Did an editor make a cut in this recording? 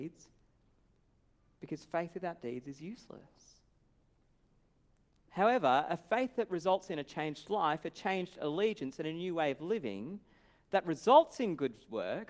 no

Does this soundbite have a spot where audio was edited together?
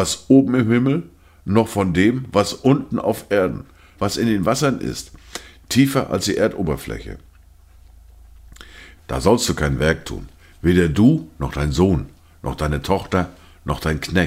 yes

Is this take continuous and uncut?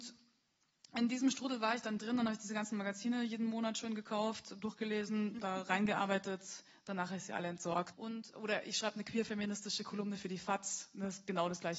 no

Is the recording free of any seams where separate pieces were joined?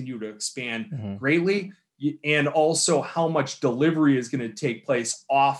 yes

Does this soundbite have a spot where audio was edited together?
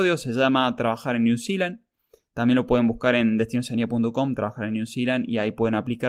no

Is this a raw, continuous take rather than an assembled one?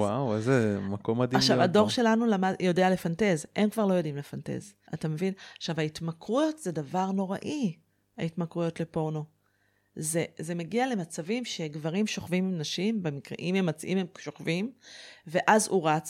no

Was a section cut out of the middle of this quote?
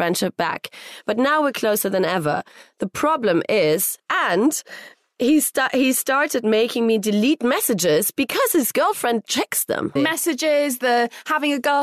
yes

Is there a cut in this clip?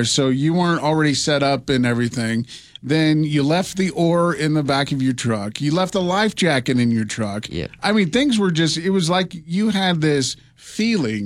no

